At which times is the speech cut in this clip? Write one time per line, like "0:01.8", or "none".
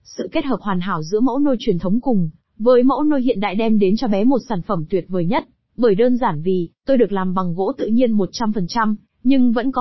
0:05.7